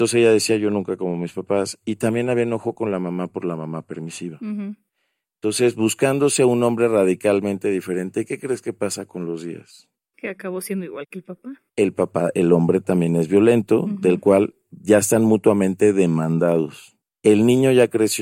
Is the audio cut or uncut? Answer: cut